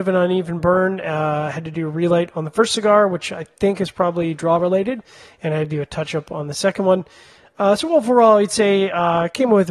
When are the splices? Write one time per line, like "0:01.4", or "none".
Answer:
none